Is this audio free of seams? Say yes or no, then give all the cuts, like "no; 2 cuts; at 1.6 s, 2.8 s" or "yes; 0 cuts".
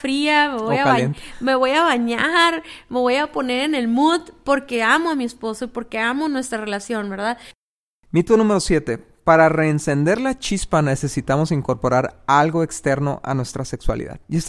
yes; 0 cuts